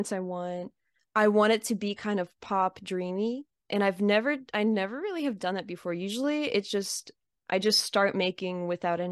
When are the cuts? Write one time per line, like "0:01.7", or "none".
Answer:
none